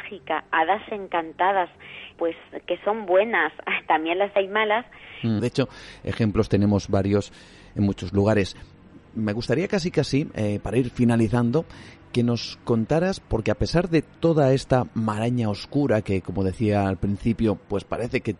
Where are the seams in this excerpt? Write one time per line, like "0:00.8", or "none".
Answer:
0:02.1
0:05.4